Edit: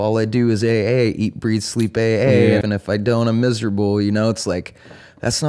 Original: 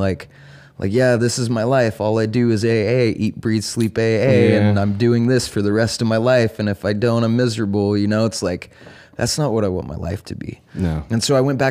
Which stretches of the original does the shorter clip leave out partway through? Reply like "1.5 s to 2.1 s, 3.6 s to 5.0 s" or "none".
4.6 s to 6.6 s